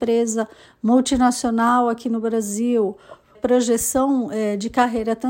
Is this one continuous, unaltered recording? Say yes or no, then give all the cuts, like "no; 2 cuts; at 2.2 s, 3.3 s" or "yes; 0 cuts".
no; 1 cut; at 3.3 s